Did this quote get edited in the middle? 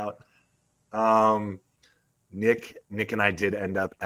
no; 0 cuts

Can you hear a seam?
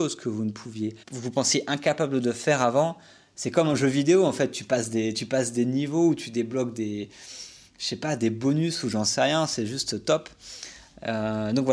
yes; 2 cuts; at 1.0 s, 3.3 s

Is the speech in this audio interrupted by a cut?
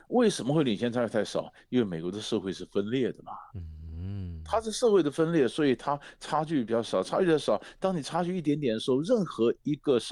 no; 0 cuts

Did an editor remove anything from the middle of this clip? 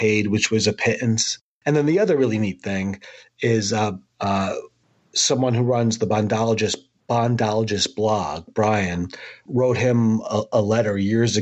yes; 3 cuts; at 1.6 s, 4.1 s, 9.5 s

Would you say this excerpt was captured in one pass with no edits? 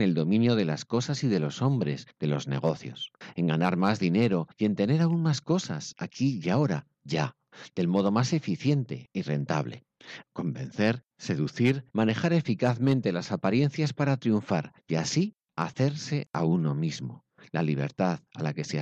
no; 2 cuts; at 10.2 s, 11.9 s

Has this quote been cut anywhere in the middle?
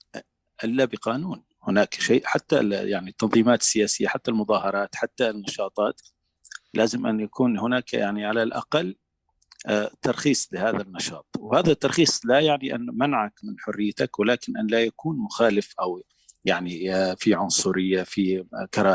no; 0 cuts

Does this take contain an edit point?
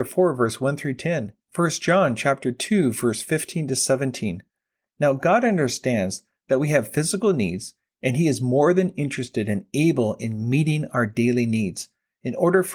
no; 0 cuts

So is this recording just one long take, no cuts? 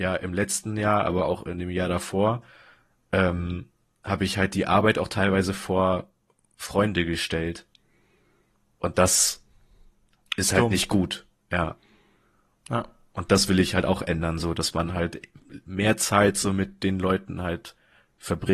yes; 0 cuts

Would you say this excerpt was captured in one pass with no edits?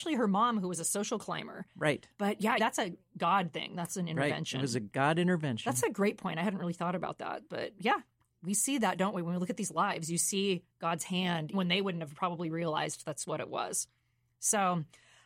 no; 2 cuts; at 2.6 s, 11.5 s

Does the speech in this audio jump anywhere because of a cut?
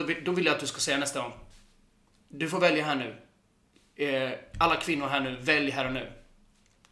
no; 0 cuts

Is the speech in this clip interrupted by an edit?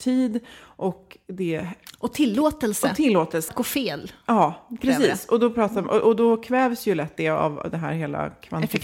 yes; 1 cut; at 3.5 s

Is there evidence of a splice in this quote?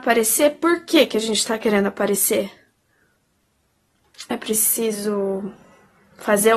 yes; 1 cut; at 4.3 s

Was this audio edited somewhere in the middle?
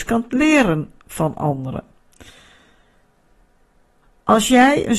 no; 0 cuts

